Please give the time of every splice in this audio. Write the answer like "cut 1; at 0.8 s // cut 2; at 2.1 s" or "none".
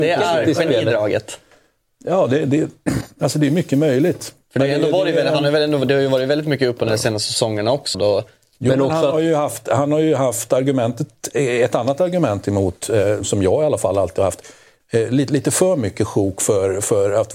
cut 1; at 7.9 s // cut 2; at 13.2 s // cut 3; at 14.8 s